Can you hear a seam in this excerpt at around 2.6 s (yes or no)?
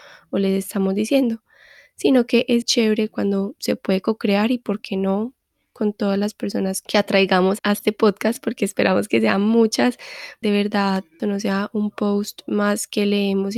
yes